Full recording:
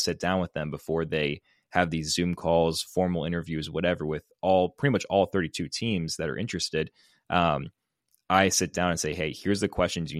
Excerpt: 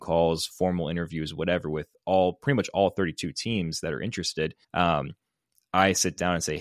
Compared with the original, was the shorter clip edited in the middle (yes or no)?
yes